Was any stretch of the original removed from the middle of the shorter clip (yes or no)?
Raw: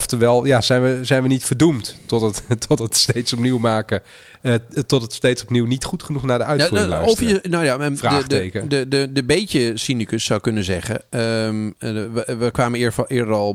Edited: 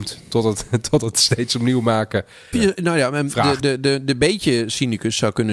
yes